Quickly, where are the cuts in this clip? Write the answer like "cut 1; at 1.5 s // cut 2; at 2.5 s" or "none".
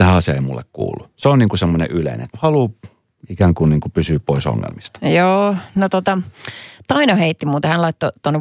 cut 1; at 2.3 s